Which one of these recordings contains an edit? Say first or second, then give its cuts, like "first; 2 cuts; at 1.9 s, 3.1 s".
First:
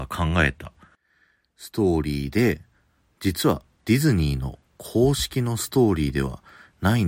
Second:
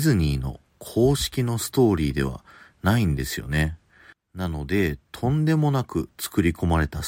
second; 1 cut; at 4.1 s